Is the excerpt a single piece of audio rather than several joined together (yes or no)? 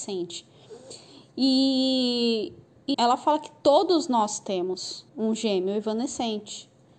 no